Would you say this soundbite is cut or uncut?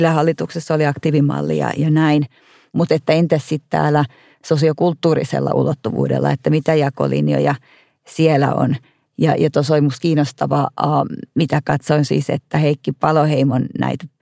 uncut